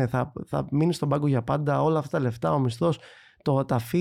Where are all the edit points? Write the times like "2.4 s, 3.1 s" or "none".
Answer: none